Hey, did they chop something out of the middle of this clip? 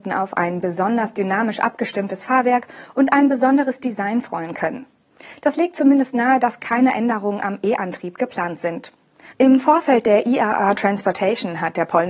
yes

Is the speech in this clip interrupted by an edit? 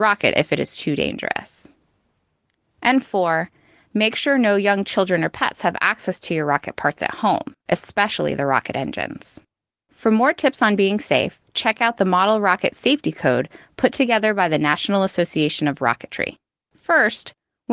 yes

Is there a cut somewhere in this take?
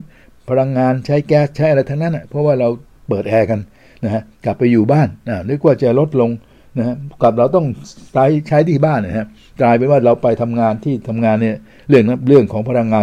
no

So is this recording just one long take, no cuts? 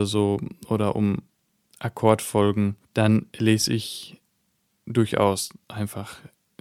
no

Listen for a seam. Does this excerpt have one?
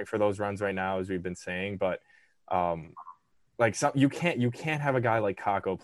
no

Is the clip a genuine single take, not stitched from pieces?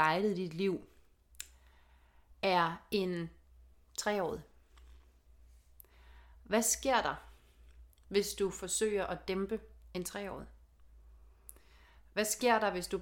yes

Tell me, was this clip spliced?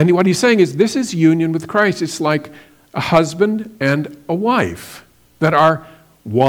no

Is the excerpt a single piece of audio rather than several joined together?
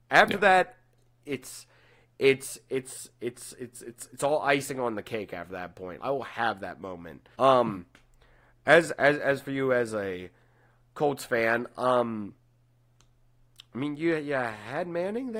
no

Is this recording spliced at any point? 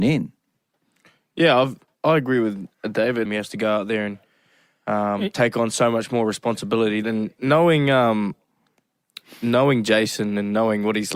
yes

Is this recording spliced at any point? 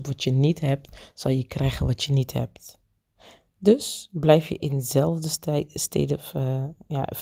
no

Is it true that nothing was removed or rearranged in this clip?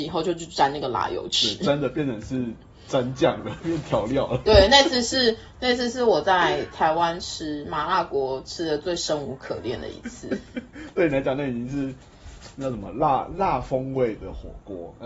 yes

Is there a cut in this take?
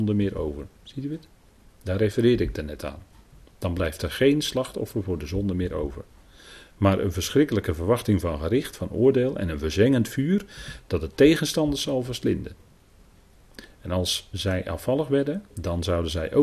yes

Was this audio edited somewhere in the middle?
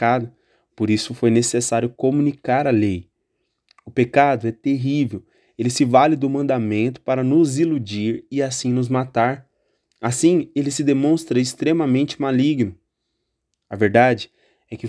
no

